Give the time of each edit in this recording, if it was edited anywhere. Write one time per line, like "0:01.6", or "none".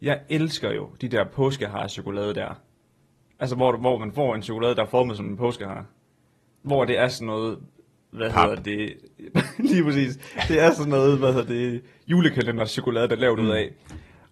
none